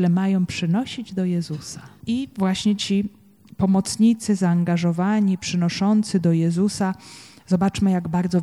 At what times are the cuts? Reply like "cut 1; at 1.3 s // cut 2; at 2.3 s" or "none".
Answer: cut 1; at 2.0 s